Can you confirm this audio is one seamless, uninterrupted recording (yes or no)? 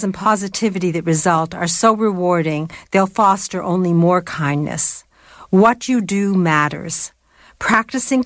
yes